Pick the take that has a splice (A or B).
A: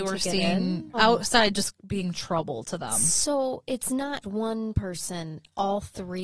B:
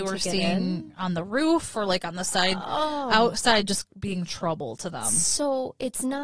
A